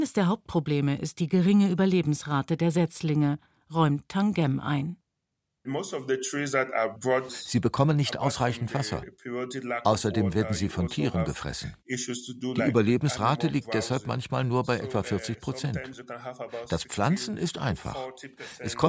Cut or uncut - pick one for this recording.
cut